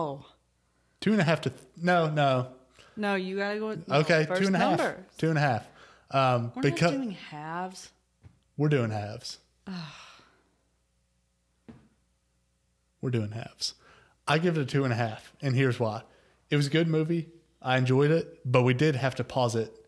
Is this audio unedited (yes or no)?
yes